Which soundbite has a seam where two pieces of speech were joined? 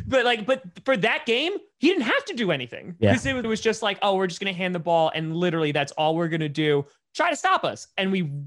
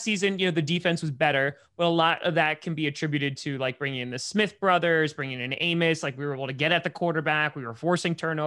first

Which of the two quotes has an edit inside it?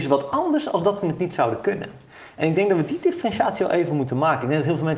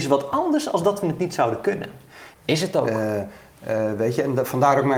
second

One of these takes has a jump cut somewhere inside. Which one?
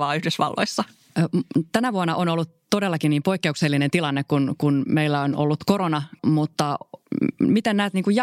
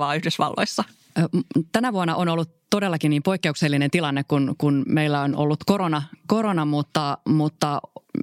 first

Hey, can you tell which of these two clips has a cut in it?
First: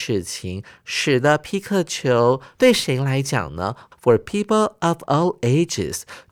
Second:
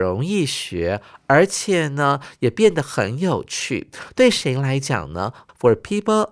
first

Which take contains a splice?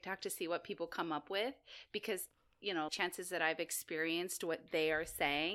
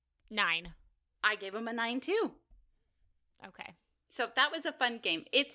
first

